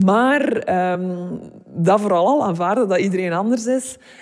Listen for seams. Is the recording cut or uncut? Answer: uncut